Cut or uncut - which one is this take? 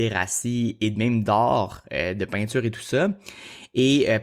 uncut